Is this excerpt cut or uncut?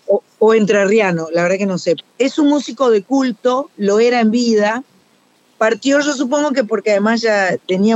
cut